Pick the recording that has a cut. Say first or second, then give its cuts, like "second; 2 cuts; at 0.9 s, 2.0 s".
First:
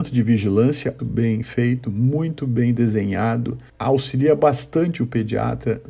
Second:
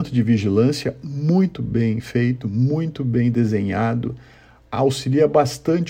first; 2 cuts; at 1.0 s, 3.7 s